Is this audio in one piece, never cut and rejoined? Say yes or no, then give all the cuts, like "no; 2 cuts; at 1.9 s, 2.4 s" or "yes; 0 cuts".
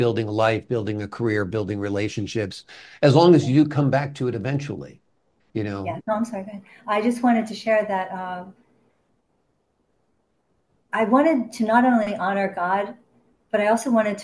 no; 1 cut; at 6.0 s